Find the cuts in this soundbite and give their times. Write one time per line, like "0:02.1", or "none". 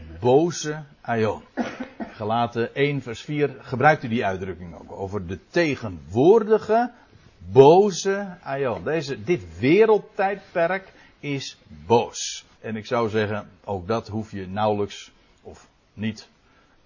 0:12.5